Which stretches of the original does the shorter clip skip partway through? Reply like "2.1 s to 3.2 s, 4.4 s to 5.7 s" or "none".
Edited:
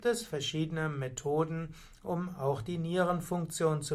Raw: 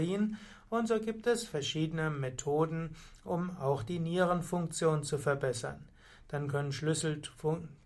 none